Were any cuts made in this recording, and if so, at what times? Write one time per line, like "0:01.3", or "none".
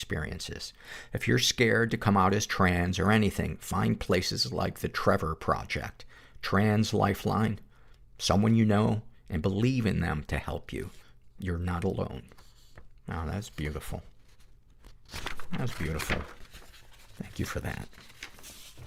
0:09.1